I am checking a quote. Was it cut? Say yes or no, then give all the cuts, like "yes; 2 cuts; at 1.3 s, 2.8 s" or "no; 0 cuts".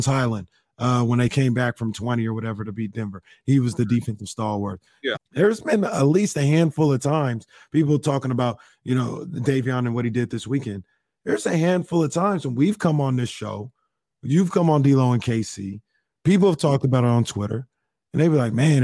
yes; 1 cut; at 5.1 s